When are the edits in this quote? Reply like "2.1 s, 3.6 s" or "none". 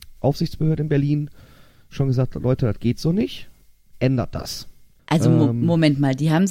5.0 s